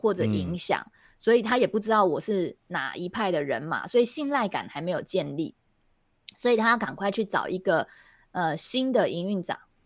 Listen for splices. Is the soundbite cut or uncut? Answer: uncut